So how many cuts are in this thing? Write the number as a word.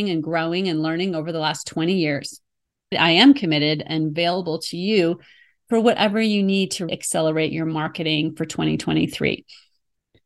two